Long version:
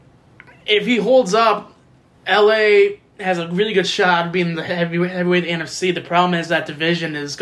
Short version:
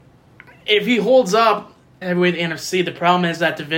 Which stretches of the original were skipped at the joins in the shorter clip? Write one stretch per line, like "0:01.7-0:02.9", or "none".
0:02.0-0:05.1